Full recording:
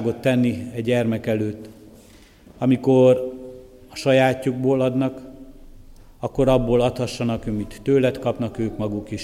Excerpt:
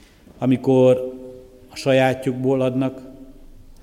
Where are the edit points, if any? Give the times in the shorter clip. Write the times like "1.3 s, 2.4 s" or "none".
none

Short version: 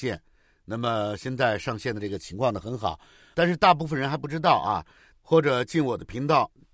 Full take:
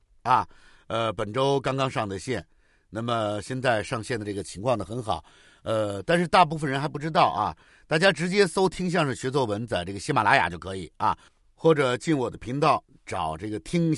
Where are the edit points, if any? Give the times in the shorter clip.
3.3 s, 5.1 s

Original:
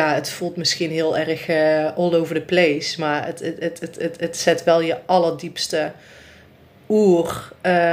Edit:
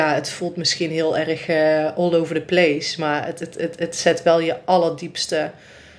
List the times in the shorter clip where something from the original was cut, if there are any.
3.4 s

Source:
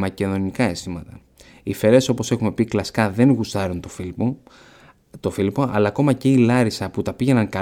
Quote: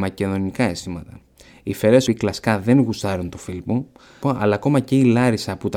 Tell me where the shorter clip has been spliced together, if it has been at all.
2.1 s, 4.2 s

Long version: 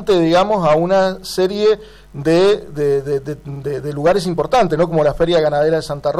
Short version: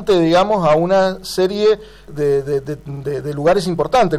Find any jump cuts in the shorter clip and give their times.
2.1 s

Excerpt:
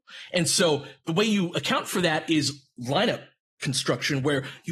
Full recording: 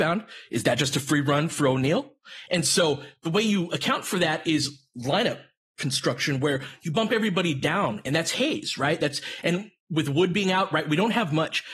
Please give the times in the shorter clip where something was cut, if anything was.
none

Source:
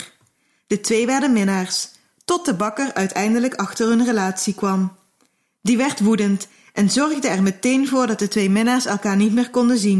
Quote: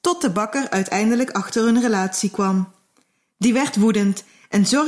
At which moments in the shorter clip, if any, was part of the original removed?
none

